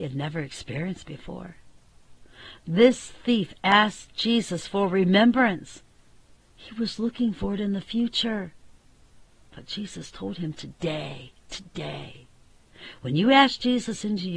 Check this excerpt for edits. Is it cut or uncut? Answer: uncut